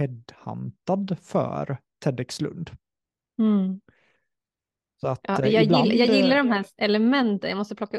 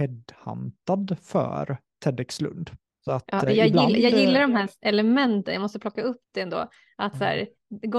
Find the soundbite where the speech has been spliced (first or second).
second